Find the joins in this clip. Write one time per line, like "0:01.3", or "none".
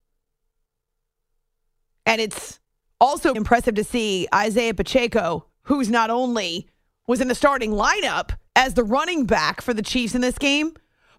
0:03.3
0:08.5